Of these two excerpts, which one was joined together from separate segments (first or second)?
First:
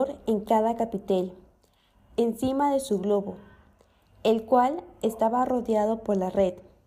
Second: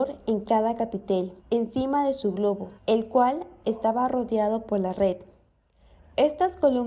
second